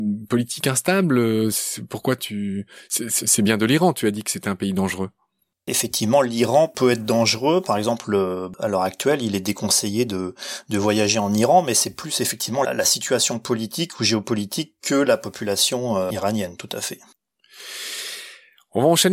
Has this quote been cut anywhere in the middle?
no; 0 cuts

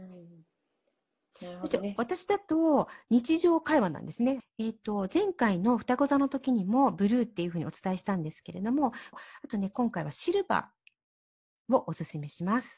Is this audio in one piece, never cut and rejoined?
no; 2 cuts; at 4.4 s, 9.1 s

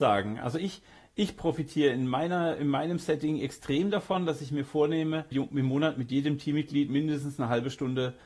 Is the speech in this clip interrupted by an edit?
yes; 1 cut; at 5.3 s

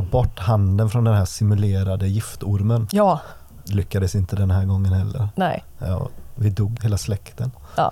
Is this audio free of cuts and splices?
no; 1 cut; at 6.8 s

